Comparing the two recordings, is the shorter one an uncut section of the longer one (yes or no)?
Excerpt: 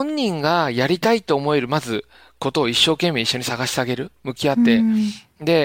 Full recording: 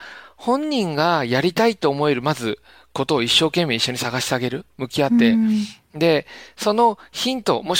yes